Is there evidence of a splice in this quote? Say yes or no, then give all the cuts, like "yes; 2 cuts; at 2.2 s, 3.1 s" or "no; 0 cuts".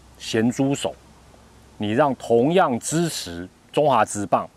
no; 0 cuts